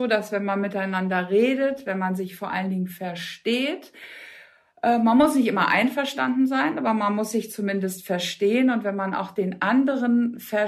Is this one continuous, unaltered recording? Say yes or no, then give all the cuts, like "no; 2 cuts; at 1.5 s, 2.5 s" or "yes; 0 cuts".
yes; 0 cuts